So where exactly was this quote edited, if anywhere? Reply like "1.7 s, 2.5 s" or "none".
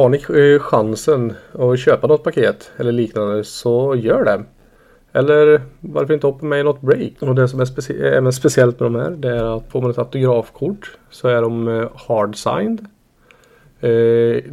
7.2 s, 9.7 s